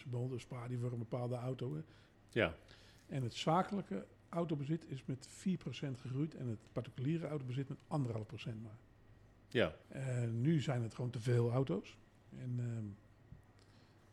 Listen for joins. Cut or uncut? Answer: cut